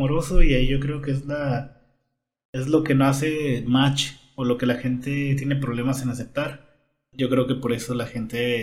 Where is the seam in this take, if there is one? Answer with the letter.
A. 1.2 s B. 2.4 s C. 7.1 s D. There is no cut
C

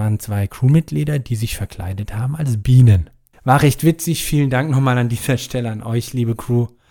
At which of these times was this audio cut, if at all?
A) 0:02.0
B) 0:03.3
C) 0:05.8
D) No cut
B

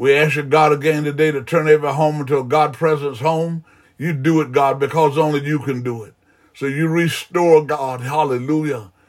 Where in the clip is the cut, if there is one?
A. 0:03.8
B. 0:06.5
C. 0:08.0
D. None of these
A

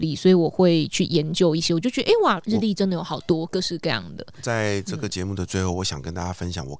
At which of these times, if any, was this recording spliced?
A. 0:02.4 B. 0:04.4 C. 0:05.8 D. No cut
A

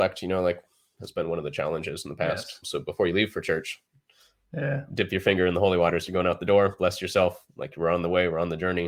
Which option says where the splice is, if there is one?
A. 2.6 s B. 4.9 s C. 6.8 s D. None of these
A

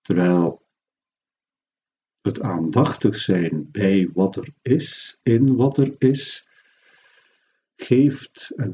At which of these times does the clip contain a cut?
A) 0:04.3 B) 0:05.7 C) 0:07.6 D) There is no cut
D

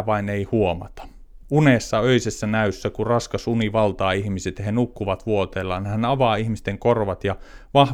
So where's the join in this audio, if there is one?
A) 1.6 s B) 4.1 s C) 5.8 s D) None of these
D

